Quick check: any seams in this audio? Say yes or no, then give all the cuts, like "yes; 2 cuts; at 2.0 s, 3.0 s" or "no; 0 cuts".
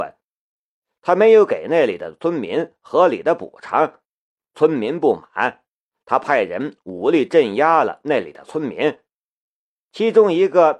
no; 0 cuts